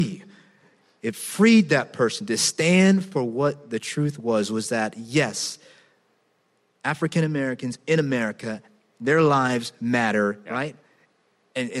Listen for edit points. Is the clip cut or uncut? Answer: cut